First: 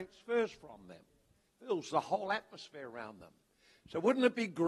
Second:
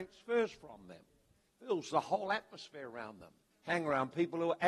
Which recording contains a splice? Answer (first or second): second